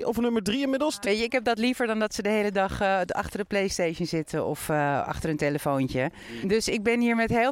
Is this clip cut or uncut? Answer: cut